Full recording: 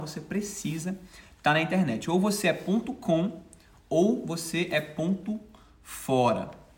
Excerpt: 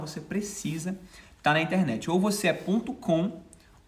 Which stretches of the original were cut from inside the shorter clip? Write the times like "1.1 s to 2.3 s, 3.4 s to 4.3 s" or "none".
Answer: none